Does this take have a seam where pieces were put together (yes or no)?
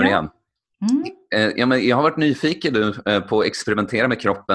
no